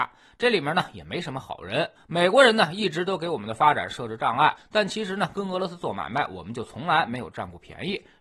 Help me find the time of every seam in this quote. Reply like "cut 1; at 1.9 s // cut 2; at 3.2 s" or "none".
cut 1; at 4.6 s